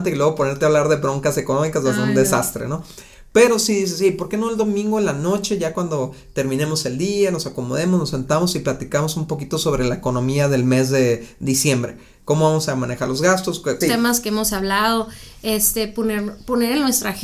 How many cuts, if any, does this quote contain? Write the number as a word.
one